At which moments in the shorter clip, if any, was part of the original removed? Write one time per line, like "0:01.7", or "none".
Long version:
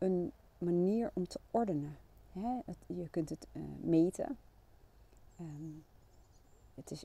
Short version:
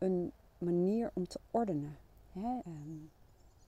0:02.6